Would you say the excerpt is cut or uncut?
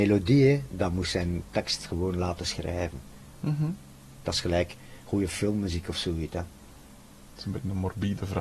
cut